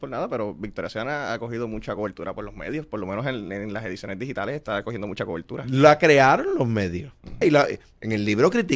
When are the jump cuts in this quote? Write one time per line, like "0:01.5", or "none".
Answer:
0:07.4